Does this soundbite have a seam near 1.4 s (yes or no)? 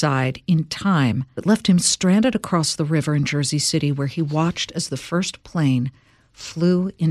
yes